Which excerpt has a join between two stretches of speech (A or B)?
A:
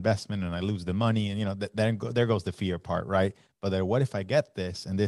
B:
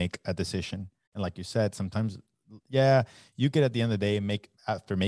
B